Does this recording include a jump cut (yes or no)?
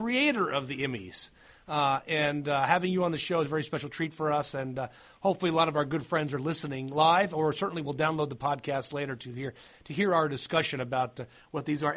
no